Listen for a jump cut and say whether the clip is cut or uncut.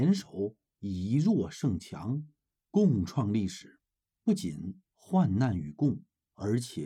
uncut